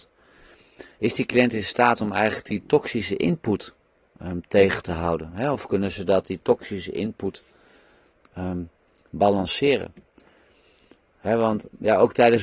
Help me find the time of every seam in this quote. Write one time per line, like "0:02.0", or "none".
none